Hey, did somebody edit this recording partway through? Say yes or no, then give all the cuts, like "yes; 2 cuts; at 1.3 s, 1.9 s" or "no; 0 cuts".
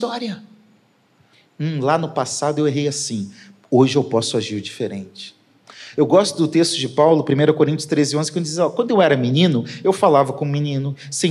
no; 0 cuts